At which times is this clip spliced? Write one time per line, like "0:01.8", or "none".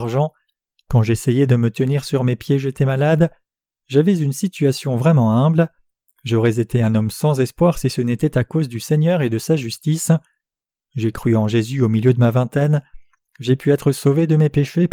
none